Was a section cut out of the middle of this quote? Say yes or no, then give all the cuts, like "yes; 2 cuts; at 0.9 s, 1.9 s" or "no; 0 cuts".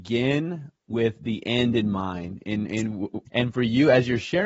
yes; 1 cut; at 3.3 s